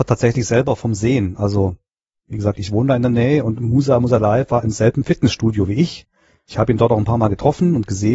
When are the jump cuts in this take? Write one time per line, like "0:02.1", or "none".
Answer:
none